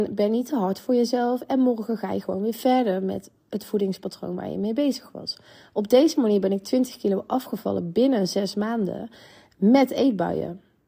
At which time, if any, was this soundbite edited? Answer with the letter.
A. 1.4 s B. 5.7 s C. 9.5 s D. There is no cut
D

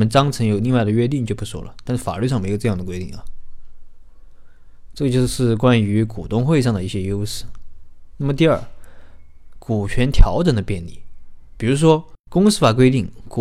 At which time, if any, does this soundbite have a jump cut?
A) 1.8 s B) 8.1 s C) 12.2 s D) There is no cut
C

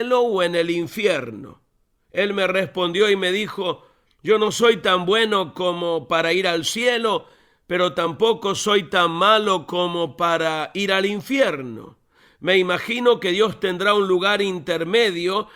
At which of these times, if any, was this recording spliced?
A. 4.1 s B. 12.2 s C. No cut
A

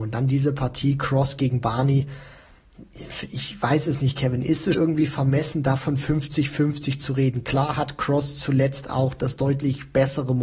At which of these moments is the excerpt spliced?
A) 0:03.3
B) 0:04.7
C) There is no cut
B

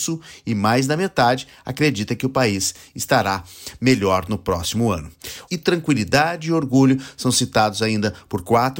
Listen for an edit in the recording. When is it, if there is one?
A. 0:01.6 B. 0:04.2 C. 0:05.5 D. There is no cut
C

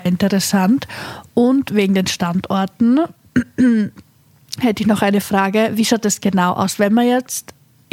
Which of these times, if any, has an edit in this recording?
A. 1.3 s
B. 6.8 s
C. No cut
C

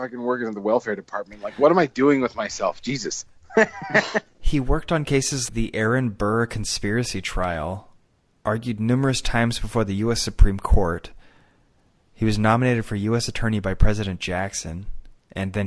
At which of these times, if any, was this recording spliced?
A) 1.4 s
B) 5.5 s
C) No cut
B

